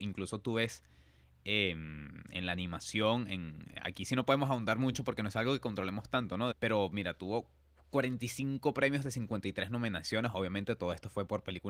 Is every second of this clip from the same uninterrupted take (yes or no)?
no